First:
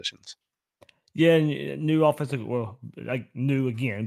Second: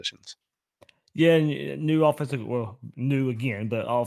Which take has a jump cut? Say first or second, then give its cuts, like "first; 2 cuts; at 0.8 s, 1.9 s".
second; 1 cut; at 2.9 s